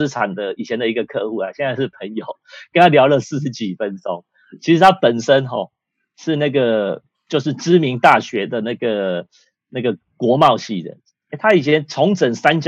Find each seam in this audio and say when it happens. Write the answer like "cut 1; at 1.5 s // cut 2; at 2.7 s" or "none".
none